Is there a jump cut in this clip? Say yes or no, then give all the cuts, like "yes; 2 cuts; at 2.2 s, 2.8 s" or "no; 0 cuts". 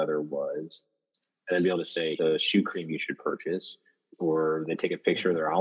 yes; 1 cut; at 2.2 s